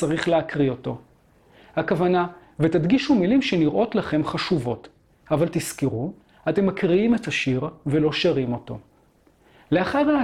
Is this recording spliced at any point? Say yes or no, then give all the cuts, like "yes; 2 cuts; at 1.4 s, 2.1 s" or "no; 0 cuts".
yes; 1 cut; at 2.4 s